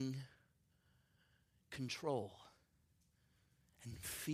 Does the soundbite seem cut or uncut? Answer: uncut